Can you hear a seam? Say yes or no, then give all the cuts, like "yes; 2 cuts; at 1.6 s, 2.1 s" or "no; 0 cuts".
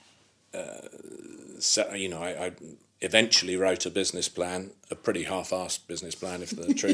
no; 0 cuts